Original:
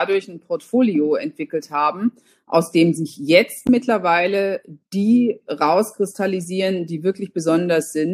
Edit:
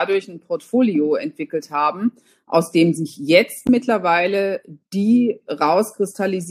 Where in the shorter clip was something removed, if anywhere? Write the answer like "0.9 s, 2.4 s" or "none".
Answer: none